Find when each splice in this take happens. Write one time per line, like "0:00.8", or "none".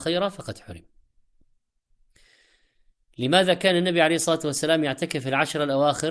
none